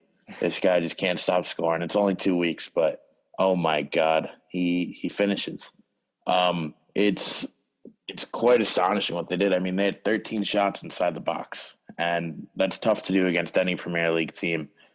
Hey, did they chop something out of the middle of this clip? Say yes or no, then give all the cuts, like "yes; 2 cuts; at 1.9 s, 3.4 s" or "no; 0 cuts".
no; 0 cuts